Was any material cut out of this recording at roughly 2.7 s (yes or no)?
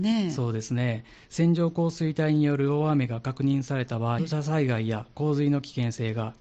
no